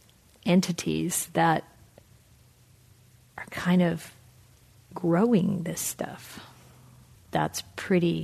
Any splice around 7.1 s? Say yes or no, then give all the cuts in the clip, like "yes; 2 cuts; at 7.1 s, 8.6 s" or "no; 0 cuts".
yes; 1 cut; at 7.1 s